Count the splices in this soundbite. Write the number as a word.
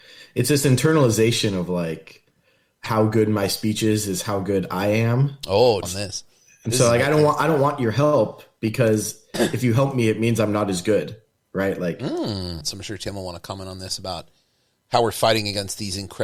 two